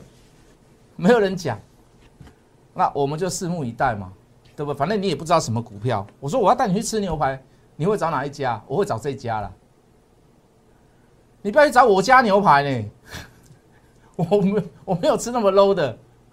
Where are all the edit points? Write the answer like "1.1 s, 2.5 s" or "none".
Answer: none